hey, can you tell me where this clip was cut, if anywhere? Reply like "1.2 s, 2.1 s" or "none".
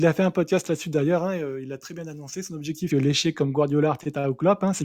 2.9 s